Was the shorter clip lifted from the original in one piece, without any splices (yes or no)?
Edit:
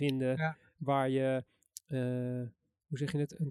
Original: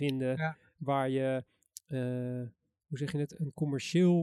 yes